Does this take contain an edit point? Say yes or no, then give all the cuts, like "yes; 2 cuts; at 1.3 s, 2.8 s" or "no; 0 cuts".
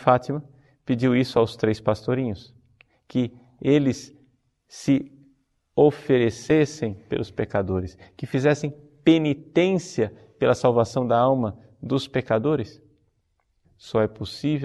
yes; 1 cut; at 13.6 s